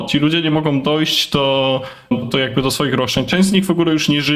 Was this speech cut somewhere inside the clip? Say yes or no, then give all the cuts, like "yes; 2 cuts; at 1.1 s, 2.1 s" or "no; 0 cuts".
yes; 1 cut; at 2.2 s